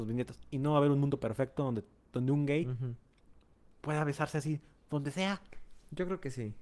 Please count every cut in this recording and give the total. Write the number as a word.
zero